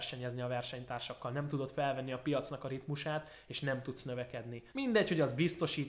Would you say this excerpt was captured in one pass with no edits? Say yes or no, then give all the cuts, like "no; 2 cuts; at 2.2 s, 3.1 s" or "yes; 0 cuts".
no; 1 cut; at 4.7 s